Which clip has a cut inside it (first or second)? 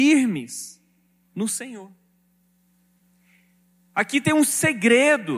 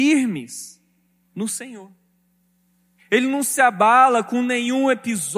second